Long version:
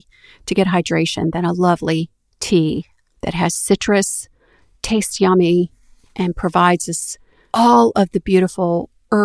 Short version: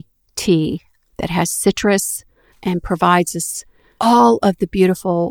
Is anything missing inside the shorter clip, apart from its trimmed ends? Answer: yes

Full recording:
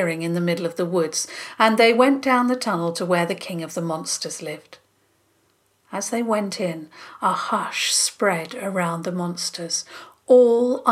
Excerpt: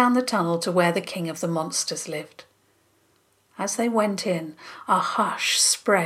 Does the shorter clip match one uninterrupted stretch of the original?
yes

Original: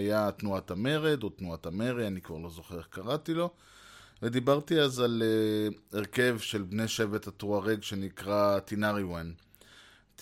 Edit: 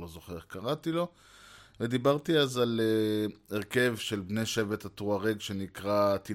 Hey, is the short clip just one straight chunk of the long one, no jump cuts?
yes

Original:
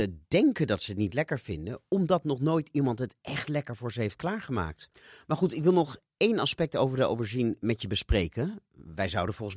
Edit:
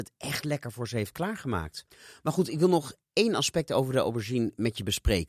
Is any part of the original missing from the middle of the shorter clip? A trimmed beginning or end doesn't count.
no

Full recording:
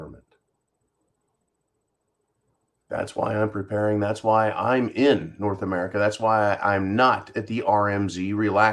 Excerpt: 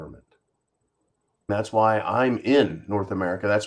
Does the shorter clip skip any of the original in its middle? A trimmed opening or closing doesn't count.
yes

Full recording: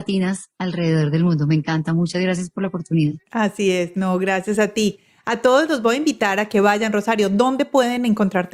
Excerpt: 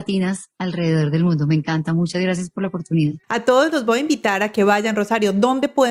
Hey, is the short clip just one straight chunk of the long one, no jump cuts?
no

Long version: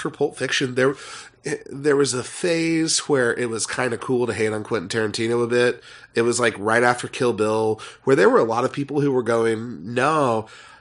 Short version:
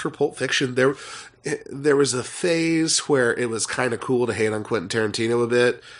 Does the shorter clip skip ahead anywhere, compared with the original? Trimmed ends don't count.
no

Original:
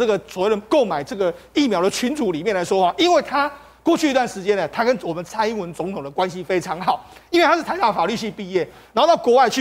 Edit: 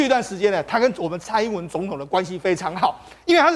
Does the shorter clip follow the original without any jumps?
yes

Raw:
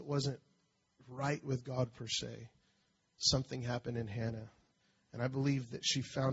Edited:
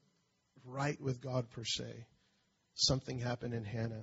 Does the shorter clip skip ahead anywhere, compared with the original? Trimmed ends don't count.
no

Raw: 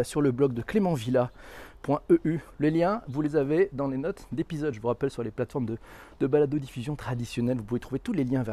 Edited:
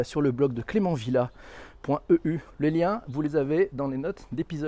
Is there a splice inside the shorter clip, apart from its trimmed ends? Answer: no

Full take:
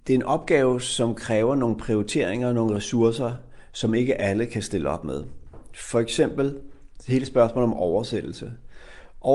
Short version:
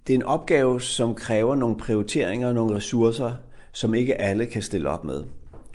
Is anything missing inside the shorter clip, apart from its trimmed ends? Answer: no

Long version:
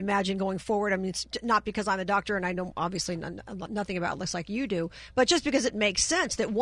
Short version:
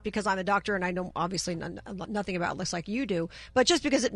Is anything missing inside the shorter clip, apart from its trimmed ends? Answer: no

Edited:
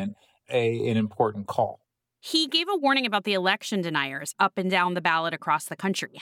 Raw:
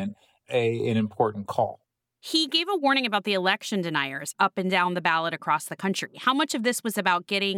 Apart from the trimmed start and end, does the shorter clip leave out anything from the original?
no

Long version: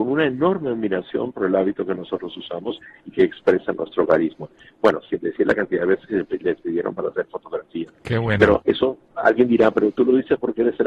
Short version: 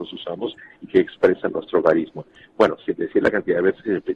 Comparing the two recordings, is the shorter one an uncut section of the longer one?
yes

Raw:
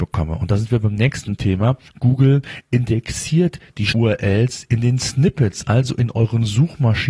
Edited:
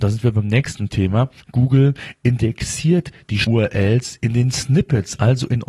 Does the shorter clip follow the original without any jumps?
yes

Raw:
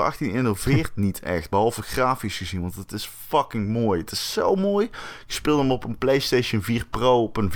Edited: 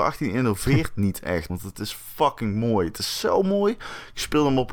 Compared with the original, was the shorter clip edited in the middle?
yes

